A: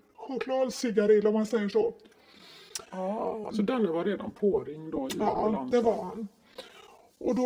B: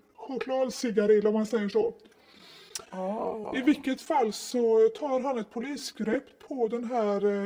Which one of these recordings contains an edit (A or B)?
A